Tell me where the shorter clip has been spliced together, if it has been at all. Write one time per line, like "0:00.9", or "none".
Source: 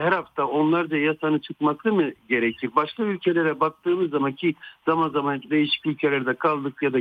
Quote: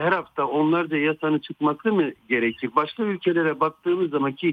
none